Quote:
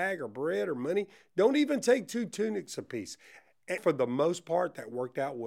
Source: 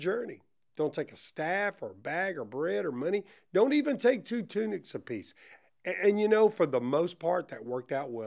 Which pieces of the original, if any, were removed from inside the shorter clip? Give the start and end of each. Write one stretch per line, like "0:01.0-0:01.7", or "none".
0:05.9-0:06.5